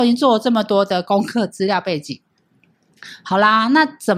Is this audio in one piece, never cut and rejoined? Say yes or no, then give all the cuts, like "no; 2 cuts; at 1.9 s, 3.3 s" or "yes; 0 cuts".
yes; 0 cuts